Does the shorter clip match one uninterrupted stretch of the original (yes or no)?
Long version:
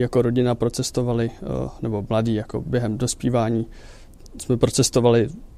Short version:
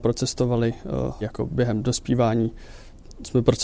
no